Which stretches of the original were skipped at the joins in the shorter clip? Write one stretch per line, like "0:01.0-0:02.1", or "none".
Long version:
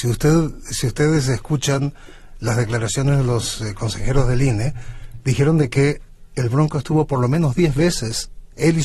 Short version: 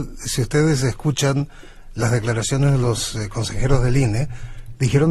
none